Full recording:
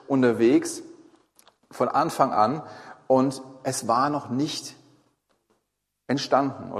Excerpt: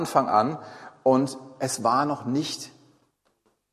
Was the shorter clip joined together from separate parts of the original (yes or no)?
no